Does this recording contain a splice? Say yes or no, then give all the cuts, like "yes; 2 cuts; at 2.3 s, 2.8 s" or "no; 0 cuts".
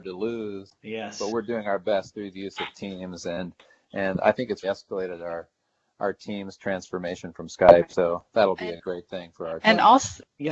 yes; 1 cut; at 4.6 s